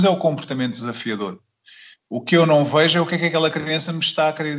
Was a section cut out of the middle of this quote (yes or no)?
no